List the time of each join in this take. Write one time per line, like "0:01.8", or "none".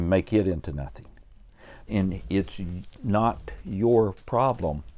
0:01.9